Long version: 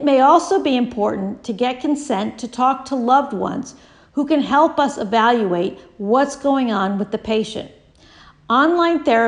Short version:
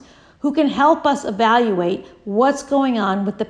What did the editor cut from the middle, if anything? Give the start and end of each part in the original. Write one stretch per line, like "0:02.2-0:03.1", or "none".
none